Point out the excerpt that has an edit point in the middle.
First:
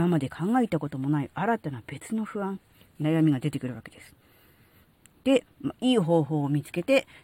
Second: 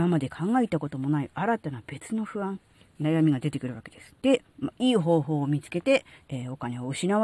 second; 2 cuts; at 4.2 s, 6.2 s

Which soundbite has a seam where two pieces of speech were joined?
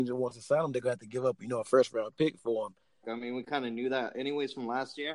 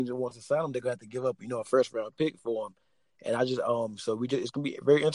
first; 1 cut; at 3.0 s

